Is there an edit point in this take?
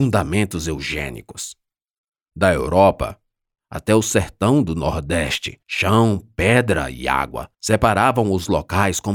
yes; 3 cuts; at 3.6 s, 5.6 s, 7.5 s

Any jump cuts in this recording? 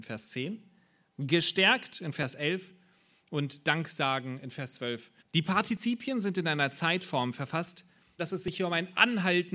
yes; 2 cuts; at 5.2 s, 8.2 s

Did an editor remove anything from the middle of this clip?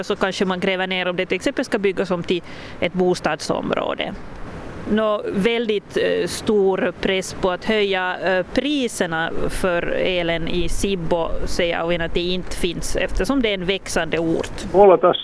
no; 0 cuts

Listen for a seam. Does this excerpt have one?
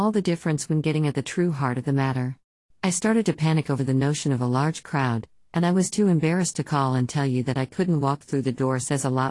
yes; 1 cut; at 2.7 s

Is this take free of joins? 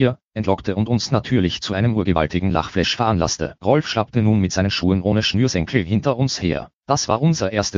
yes; 0 cuts

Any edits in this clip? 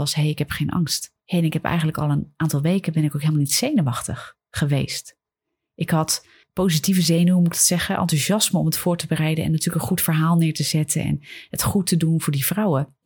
no; 0 cuts

